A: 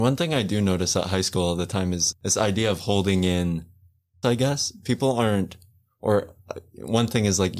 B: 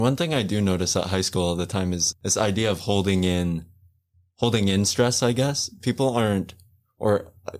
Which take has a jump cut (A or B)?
A